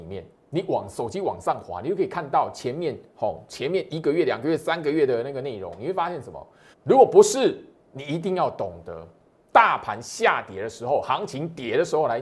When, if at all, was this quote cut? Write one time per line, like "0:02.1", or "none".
0:06.7